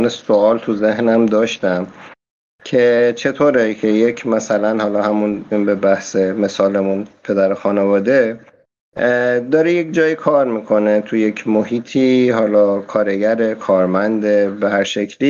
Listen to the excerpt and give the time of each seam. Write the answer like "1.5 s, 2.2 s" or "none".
5.5 s